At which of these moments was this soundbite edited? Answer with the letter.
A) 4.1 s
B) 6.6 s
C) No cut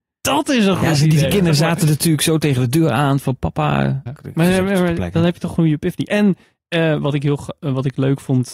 A